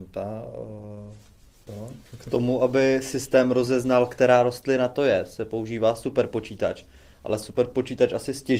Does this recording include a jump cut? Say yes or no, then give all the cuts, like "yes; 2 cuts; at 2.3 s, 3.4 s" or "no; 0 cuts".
yes; 1 cut; at 1.7 s